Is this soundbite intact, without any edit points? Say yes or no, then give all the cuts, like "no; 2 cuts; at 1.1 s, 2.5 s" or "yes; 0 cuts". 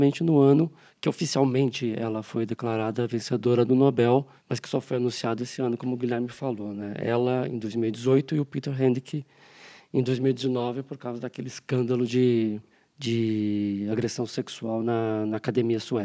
yes; 0 cuts